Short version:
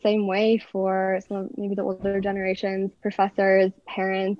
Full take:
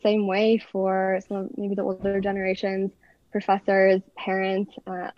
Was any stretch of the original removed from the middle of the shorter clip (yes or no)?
yes